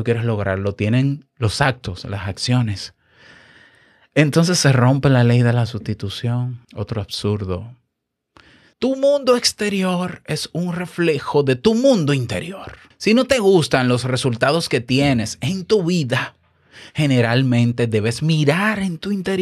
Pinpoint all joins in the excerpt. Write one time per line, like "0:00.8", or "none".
0:06.6
0:08.7
0:12.9